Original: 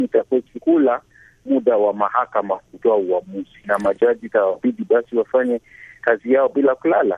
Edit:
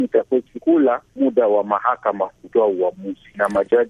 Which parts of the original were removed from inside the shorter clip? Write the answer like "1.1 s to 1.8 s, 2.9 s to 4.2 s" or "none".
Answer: 1.1 s to 1.4 s